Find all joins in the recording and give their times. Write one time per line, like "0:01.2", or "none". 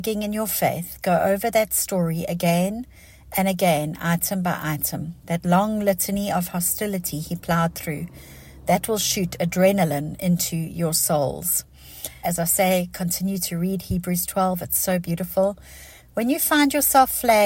0:12.2
0:16.0